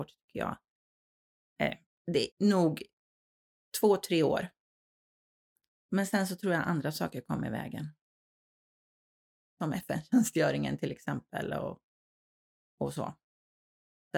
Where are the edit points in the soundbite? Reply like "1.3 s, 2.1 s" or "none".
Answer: 2.3 s